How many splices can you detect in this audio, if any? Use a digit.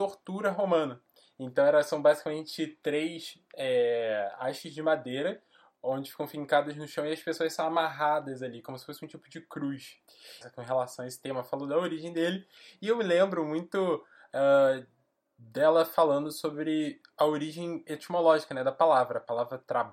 1